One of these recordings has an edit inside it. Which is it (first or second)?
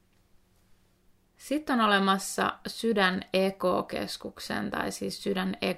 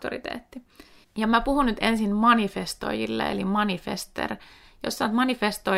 second